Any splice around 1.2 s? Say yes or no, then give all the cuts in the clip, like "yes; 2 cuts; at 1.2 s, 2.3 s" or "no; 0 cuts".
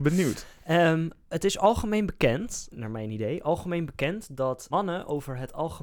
no; 2 cuts; at 2.7 s, 4.7 s